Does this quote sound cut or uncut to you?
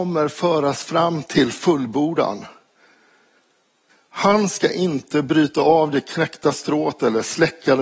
uncut